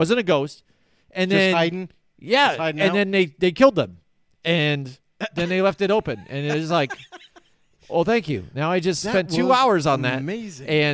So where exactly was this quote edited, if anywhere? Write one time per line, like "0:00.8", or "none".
none